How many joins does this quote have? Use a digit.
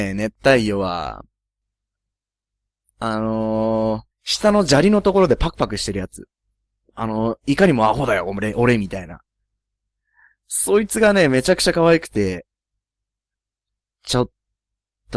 1